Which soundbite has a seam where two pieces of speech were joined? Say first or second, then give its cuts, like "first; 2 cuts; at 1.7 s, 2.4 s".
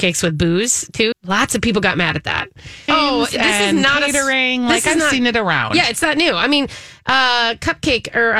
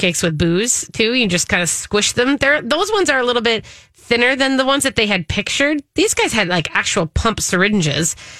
first; 2 cuts; at 1.1 s, 2.9 s